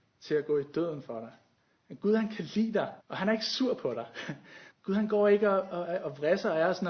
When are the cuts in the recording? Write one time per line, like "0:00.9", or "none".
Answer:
0:03.0
0:04.7

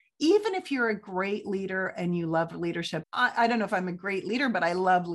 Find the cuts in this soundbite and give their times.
0:03.0

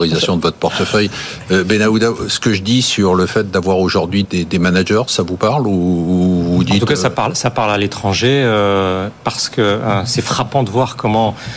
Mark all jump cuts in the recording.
0:04.2

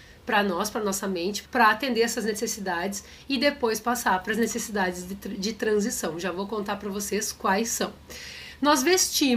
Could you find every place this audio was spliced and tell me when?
0:01.4

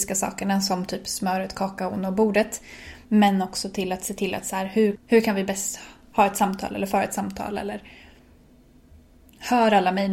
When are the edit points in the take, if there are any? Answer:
0:03.0
0:04.9

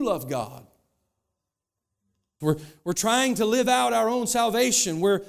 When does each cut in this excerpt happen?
0:02.4

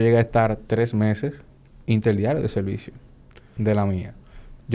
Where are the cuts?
0:03.6

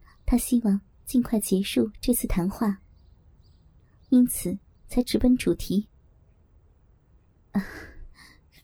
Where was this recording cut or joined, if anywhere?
none

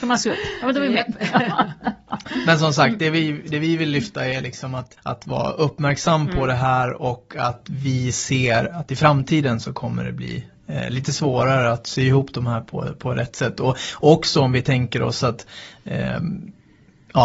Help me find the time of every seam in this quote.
none

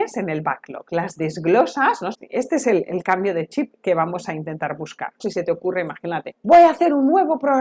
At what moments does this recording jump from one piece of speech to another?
0:02.1
0:05.2

